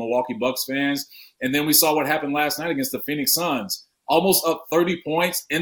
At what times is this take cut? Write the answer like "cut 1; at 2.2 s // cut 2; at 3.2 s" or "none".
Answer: none